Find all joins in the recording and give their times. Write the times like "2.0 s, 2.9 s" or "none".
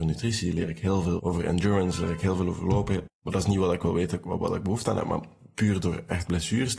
1.2 s, 3.1 s